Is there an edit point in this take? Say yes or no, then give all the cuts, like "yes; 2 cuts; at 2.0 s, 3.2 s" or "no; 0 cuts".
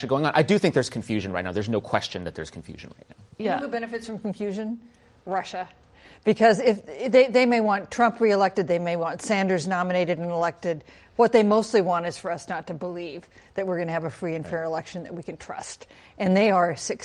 no; 0 cuts